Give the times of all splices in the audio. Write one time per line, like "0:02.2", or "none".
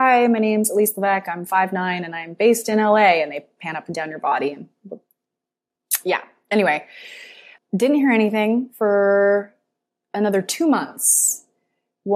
0:07.6